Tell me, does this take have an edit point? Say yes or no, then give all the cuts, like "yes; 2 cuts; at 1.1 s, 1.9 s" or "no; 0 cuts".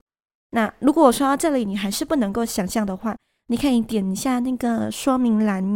no; 0 cuts